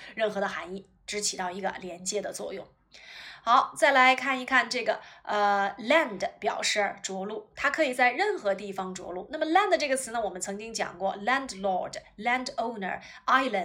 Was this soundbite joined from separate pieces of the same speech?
no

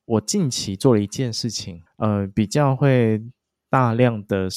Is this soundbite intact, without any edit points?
no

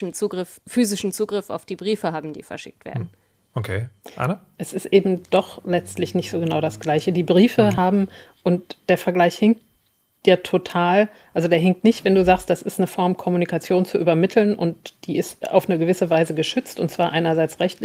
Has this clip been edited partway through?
no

